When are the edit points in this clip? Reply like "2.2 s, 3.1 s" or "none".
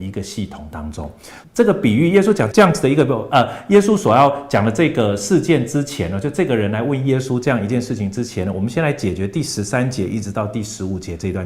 1.4 s, 2.5 s